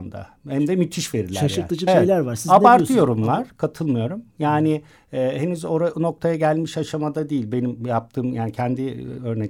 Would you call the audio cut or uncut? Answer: cut